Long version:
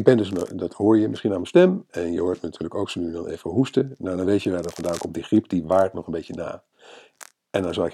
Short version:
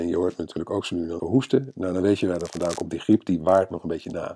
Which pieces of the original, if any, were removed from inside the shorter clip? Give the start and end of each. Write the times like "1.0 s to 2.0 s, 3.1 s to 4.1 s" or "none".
3.2 s to 3.4 s